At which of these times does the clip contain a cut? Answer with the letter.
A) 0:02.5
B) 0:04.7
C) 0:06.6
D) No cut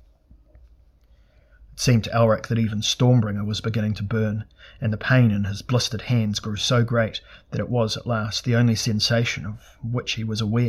D